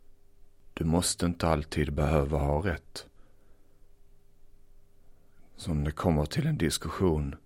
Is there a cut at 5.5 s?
yes; 1 cut; at 5.5 s

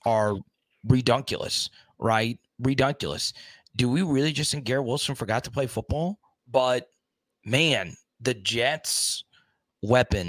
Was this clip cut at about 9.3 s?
no; 1 cut; at 6.4 s

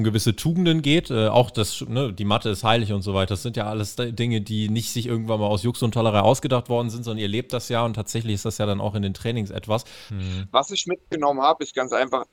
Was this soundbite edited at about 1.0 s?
no; 1 cut; at 10.1 s

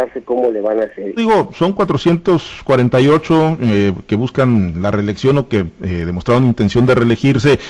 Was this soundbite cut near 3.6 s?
no; 1 cut; at 1.2 s

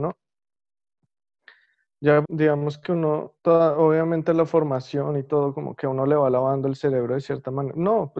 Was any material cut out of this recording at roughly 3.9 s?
no; 1 cut; at 2.2 s

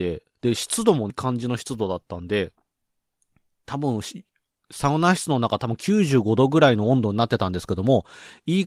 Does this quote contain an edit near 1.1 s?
yes; 1 cut; at 1.1 s

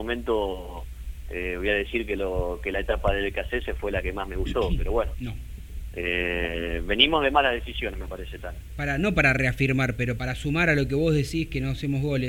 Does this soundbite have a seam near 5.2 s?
no; 2 cuts; at 8.7 s, 10.2 s

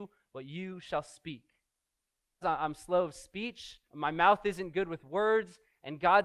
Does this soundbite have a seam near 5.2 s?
no; 2 cuts; at 2.4 s, 3.9 s

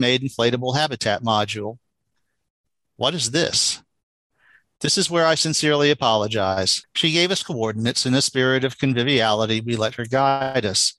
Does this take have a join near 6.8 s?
yes; 1 cut; at 6.8 s

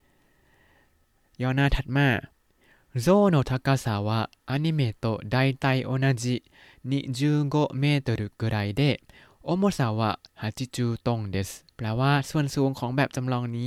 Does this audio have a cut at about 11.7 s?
yes; 1 cut; at 11.7 s

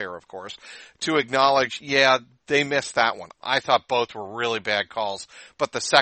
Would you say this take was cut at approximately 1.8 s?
no; 1 cut; at 3.4 s

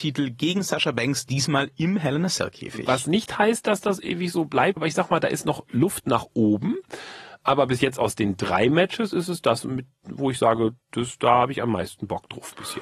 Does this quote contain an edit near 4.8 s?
yes; 1 cut; at 4.8 s

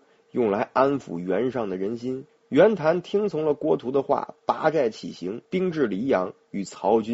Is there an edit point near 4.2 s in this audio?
no; 2 cuts; at 2.3 s, 5.5 s

